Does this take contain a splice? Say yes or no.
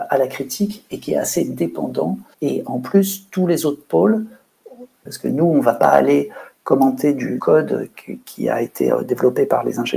yes